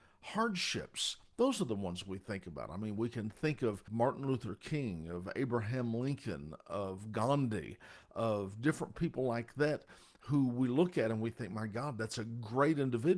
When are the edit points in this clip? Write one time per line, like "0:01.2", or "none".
none

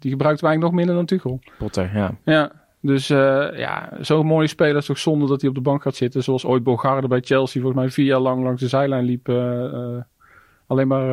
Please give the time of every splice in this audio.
none

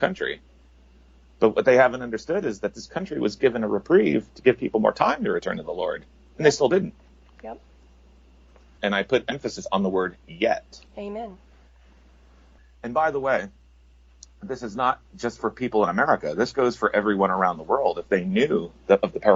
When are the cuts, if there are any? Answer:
0:08.8

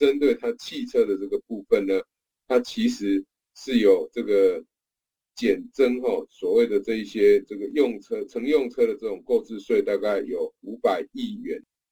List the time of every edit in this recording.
none

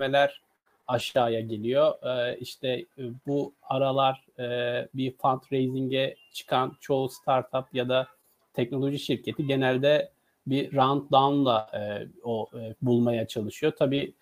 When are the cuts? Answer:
0:12.7

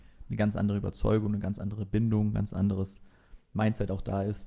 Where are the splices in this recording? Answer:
none

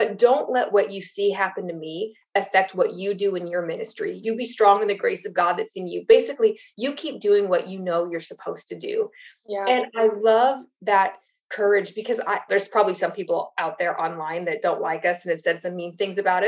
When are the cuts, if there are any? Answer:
0:12.5

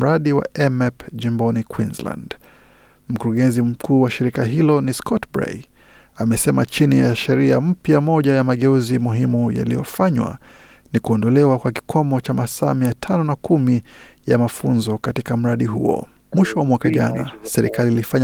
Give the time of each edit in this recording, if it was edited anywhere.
0:16.3

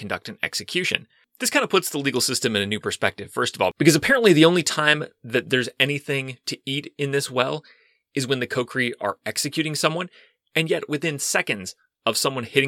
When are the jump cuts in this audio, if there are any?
none

